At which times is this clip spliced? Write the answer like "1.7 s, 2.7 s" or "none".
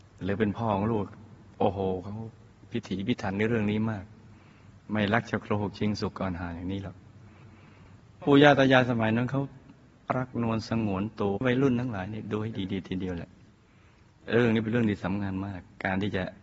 11.4 s